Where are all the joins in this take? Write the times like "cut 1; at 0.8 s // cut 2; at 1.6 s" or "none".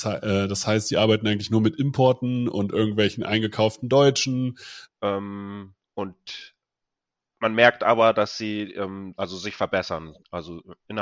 cut 1; at 4.9 s // cut 2; at 9.2 s